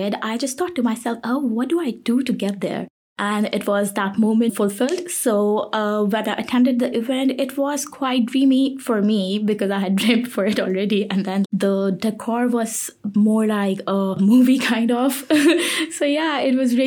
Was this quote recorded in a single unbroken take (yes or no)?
no